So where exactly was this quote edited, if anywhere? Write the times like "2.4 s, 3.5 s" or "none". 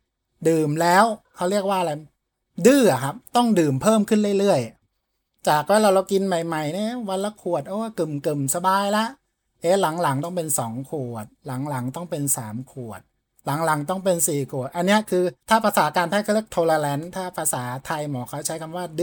1.2 s, 15.4 s